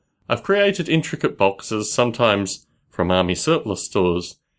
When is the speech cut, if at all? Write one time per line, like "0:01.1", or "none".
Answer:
none

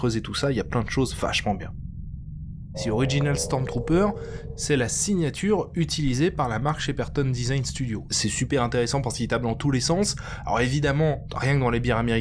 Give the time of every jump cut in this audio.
0:02.7
0:08.1

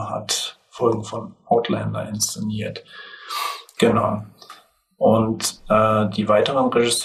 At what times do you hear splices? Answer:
0:03.8

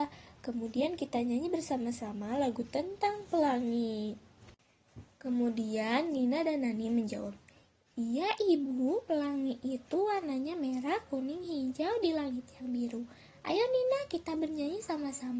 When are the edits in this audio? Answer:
none

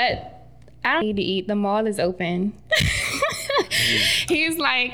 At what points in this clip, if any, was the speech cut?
0:01.0

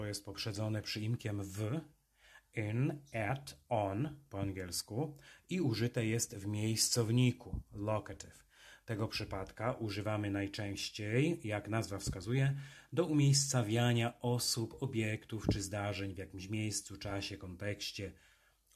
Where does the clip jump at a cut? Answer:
none

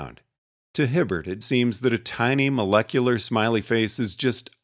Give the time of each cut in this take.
0:01.4

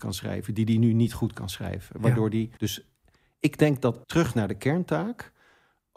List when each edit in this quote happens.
0:02.6
0:04.0

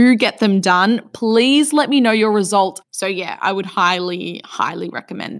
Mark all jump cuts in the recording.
0:02.8

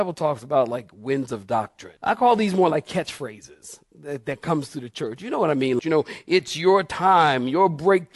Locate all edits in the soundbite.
0:02.0
0:05.8

